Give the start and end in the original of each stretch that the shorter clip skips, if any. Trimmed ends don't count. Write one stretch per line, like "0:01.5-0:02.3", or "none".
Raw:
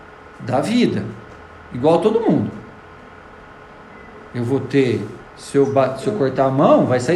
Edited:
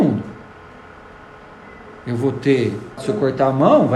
0:05.3-0:06.0